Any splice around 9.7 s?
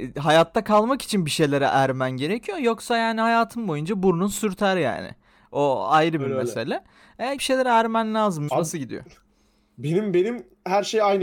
no; 2 cuts; at 7.4 s, 8.5 s

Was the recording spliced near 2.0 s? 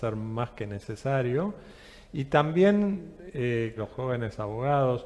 no; 1 cut; at 3.8 s

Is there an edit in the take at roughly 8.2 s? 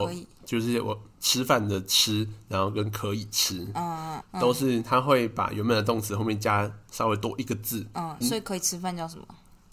yes; 2 cuts; at 4.2 s, 8.2 s

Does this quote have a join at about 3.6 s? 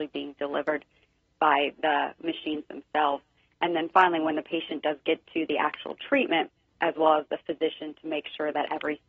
no; 1 cut; at 6.7 s

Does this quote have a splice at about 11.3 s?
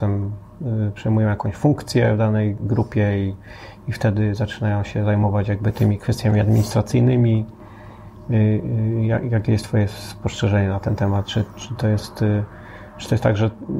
no; 0 cuts

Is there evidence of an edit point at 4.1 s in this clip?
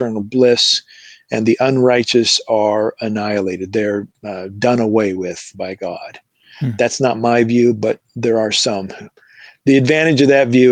no; 1 cut; at 5.5 s

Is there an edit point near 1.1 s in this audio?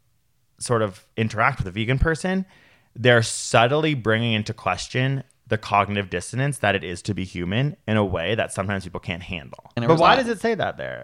yes; 2 cuts; at 1.1 s, 9.8 s

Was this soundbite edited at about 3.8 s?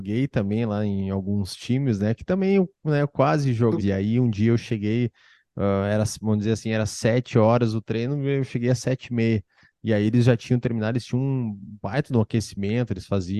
yes; 1 cut; at 3.8 s

